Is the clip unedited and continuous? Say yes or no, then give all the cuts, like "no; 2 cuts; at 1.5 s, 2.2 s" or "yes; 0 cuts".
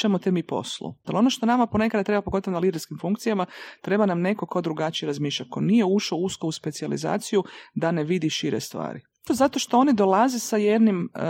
no; 2 cuts; at 1.0 s, 9.3 s